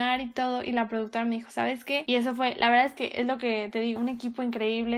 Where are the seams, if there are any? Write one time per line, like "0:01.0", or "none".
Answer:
0:02.1
0:04.0